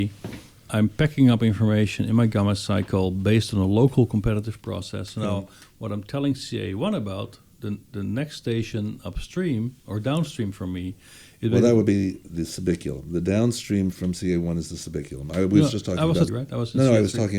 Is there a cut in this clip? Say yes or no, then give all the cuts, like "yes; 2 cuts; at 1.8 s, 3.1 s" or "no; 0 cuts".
yes; 1 cut; at 16.3 s